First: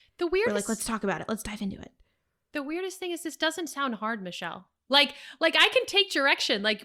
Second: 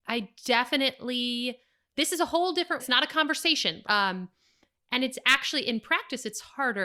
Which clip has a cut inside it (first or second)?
second